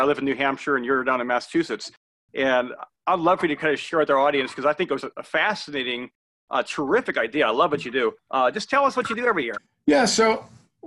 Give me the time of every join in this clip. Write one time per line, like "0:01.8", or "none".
0:05.0